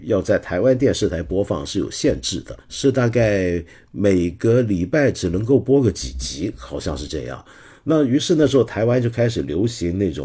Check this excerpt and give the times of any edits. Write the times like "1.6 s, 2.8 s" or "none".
none